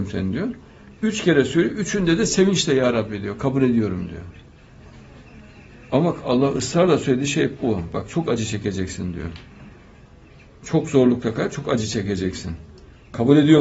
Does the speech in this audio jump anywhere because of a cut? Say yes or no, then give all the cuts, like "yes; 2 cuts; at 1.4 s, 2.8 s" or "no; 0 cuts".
no; 0 cuts